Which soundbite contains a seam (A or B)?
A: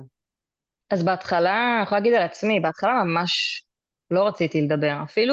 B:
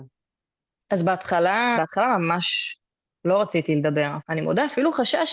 B